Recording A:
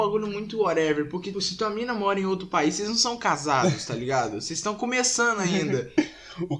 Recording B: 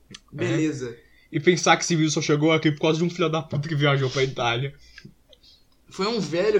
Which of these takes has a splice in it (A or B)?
A